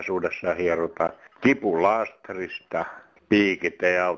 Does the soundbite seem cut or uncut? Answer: uncut